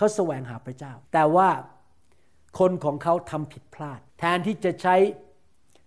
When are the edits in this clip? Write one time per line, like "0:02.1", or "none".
0:01.0
0:04.1